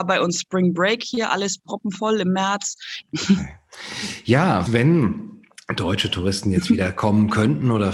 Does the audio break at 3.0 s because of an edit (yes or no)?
yes